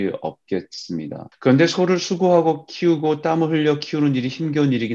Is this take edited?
yes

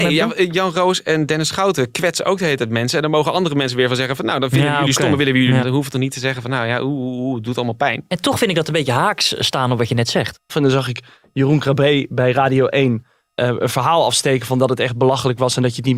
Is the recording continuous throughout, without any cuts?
no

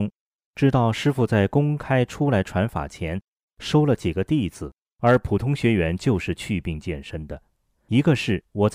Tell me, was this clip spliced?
yes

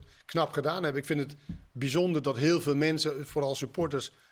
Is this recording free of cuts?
yes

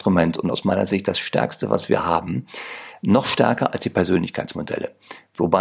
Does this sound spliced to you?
no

